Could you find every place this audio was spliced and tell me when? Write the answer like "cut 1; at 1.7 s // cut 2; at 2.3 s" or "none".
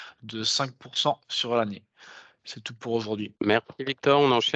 cut 1; at 3.4 s